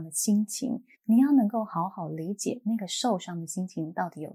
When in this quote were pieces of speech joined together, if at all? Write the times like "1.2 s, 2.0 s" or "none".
0.9 s